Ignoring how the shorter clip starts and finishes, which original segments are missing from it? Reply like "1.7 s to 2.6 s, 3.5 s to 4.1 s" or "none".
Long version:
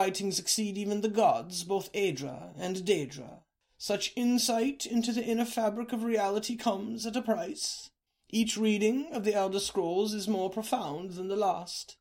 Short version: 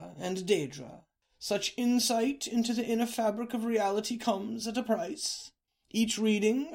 none